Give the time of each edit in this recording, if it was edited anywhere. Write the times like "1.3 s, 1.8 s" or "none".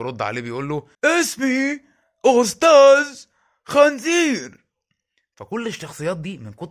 0.9 s